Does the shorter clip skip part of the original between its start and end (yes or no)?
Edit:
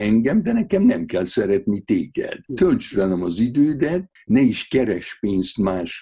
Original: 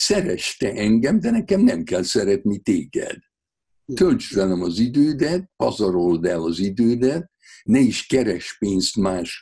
yes